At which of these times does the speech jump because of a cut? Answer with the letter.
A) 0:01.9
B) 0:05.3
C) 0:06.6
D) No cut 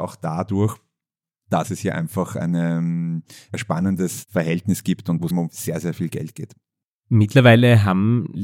B